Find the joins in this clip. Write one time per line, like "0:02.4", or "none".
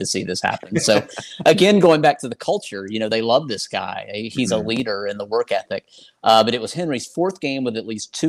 none